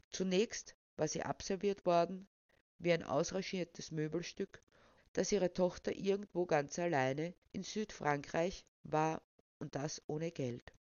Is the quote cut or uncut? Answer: cut